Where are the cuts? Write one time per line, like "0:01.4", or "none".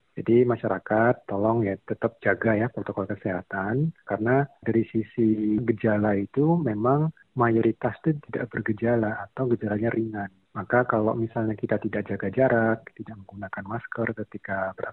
none